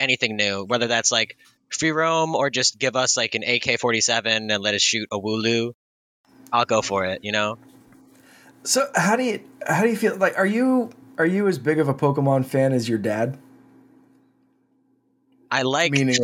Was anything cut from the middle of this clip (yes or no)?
no